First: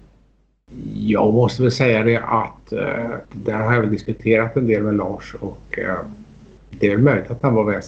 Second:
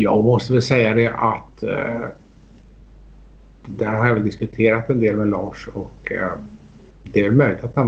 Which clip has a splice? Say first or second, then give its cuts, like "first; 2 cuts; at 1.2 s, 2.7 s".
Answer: first; 1 cut; at 3.2 s